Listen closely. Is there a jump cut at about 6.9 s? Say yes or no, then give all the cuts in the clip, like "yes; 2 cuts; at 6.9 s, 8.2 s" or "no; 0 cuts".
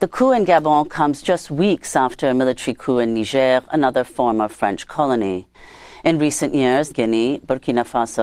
yes; 1 cut; at 6.9 s